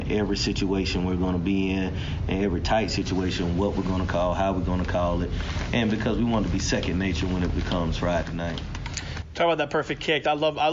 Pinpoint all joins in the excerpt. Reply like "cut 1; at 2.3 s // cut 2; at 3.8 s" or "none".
none